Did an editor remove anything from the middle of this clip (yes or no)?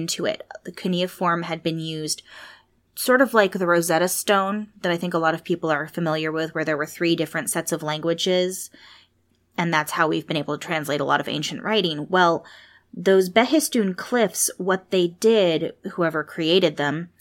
no